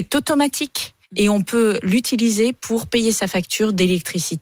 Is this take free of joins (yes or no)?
no